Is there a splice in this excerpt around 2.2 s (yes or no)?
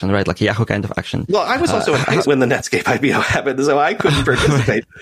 yes